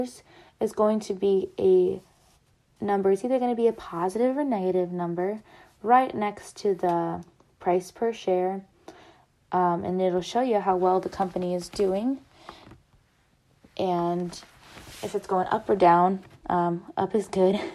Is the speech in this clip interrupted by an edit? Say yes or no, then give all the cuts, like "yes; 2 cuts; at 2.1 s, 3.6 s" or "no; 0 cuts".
no; 0 cuts